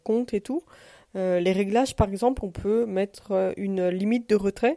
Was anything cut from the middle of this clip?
no; 0 cuts

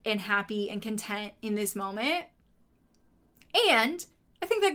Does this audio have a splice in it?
no; 0 cuts

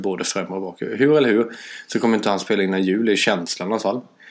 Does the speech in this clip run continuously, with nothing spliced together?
yes; 0 cuts

